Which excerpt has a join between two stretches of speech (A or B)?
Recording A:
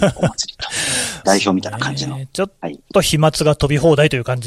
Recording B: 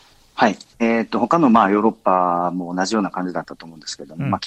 A